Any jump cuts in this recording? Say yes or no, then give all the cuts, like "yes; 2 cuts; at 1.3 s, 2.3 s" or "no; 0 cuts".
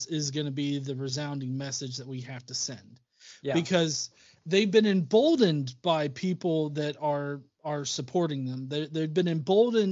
no; 0 cuts